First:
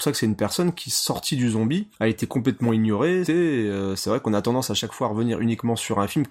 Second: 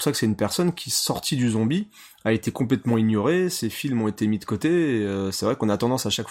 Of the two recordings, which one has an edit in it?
first; 2 cuts; at 1.9 s, 3.3 s

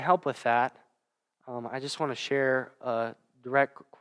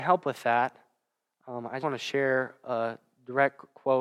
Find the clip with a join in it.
second; 1 cut; at 1.8 s

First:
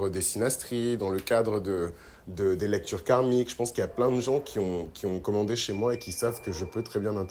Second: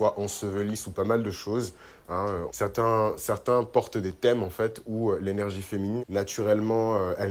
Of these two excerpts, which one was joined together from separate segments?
second; 2 cuts; at 2.5 s, 6.0 s

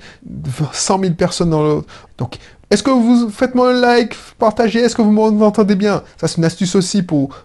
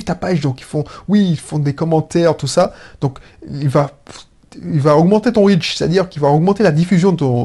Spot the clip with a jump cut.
first; 1 cut; at 2.1 s

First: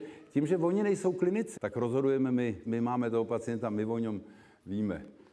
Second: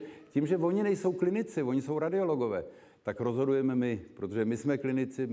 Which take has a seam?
first; 2 cuts; at 1.6 s, 2.7 s

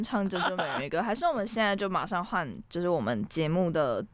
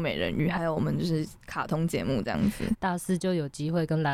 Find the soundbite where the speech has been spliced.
second; 1 cut; at 2.8 s

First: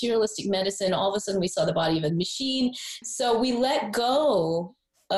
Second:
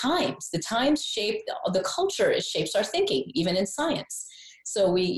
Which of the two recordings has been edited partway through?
first; 1 cut; at 3.0 s

